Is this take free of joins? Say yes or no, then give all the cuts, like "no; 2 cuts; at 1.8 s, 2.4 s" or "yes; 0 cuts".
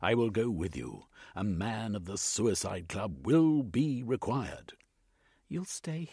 yes; 0 cuts